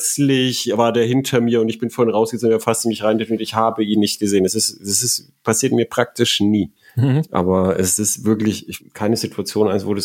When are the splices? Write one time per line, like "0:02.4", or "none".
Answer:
0:07.3
0:08.8